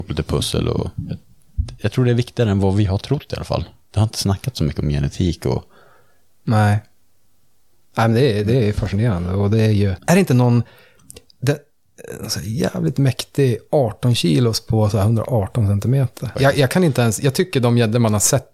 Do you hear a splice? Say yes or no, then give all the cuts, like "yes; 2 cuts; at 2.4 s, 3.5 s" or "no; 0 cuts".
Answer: yes; 2 cuts; at 10.0 s, 16.3 s